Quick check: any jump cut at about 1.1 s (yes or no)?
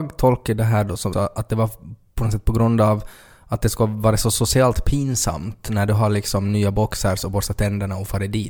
yes